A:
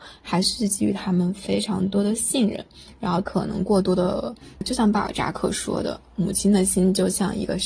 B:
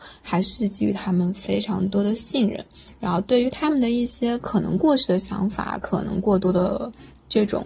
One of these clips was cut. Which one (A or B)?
A